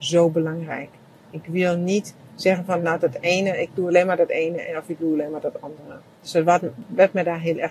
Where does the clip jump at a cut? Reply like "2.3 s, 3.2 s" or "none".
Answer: 1.3 s